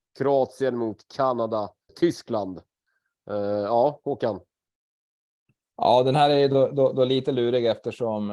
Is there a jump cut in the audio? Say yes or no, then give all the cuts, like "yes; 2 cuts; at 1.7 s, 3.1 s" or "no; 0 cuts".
yes; 1 cut; at 1.9 s